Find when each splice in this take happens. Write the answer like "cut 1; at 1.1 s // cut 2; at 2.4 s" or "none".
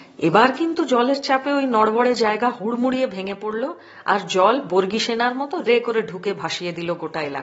cut 1; at 5.7 s